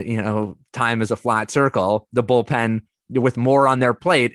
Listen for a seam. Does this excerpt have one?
no; 0 cuts

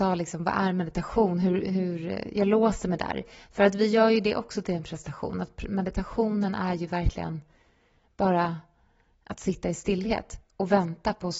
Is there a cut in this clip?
no; 0 cuts

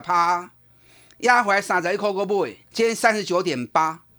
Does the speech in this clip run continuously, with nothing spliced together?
no; 1 cut; at 2.6 s

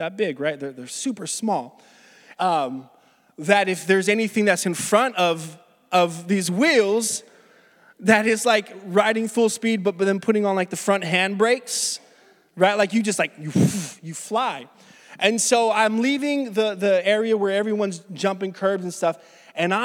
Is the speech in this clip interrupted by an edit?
yes; 1 cut; at 2.4 s

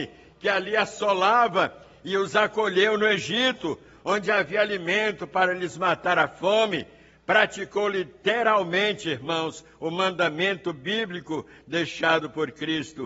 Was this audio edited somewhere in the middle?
no; 0 cuts

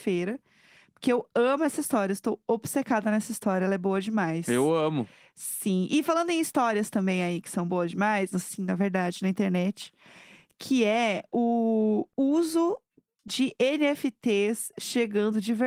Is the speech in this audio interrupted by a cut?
yes; 1 cut; at 8.3 s

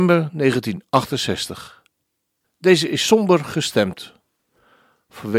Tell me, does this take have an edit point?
yes; 1 cut; at 2.4 s

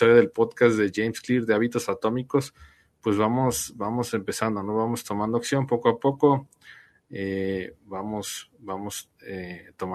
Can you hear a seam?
no; 0 cuts

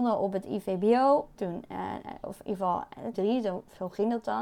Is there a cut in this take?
yes; 2 cuts; at 1.4 s, 3.1 s

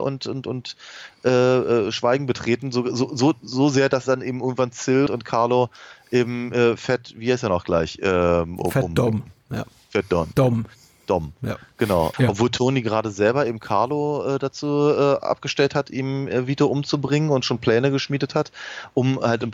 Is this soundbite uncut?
no; 3 cuts; at 5.1 s, 10.3 s, 12.1 s

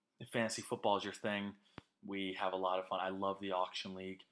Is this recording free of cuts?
yes; 0 cuts

